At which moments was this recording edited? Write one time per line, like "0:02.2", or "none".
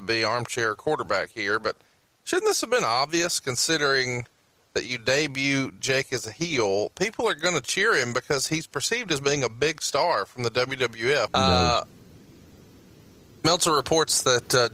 0:11.3

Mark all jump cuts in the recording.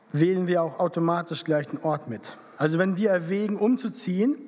0:02.6

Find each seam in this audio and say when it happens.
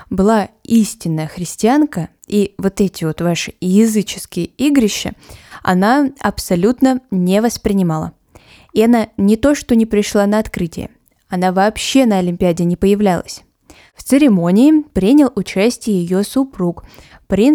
none

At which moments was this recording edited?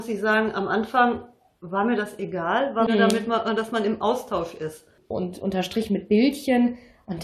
0:02.9
0:05.1

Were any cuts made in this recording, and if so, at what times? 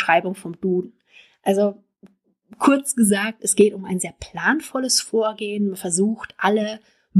none

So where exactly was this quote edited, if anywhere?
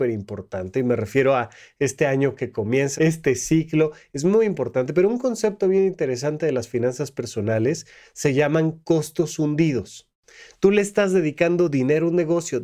0:03.0

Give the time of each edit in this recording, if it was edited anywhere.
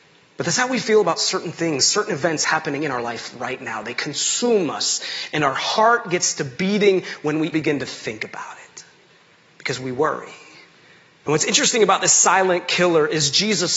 0:07.5

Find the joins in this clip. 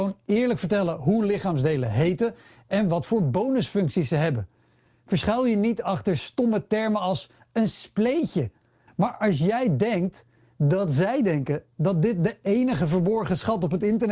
0:08.9

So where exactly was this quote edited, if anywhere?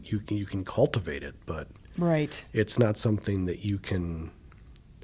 none

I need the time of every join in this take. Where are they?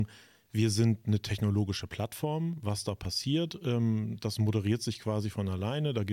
none

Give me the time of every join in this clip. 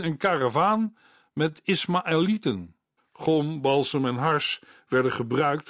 0:03.0

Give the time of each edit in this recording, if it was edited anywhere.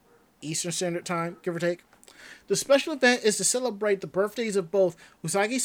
none

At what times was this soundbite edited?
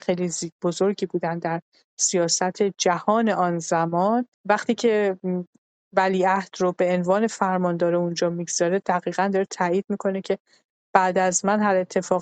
0:04.3

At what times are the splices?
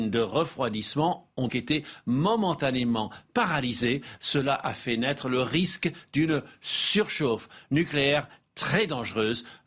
0:01.5

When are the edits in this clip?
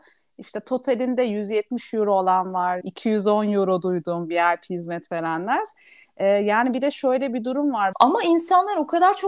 0:02.8
0:07.9

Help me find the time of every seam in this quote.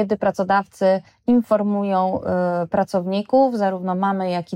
none

